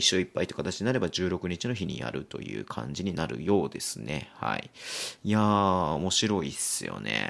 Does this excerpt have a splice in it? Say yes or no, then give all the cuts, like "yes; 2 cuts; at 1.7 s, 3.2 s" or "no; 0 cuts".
no; 0 cuts